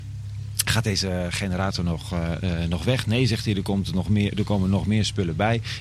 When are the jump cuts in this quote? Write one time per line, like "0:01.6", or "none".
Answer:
none